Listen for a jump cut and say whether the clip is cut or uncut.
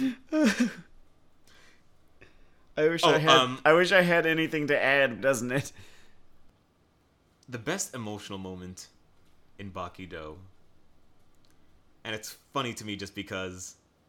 cut